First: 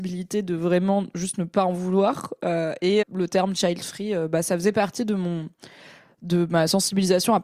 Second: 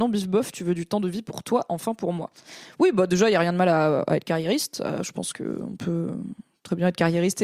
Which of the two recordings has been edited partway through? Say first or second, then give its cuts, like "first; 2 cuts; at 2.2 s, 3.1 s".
first; 1 cut; at 3.0 s